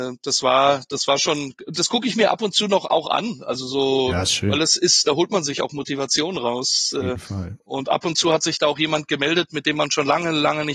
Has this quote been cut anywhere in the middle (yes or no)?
no